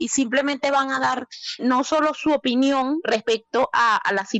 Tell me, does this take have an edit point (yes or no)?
yes